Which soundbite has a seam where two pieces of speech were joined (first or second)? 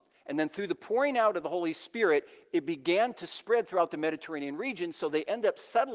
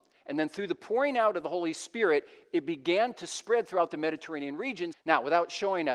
second